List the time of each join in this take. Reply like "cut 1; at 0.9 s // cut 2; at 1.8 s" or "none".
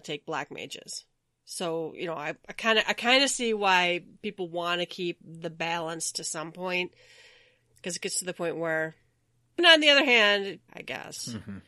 cut 1; at 9.6 s // cut 2; at 10.7 s